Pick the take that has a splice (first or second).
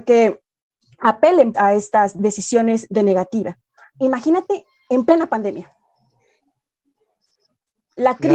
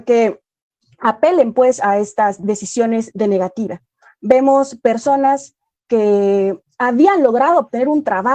first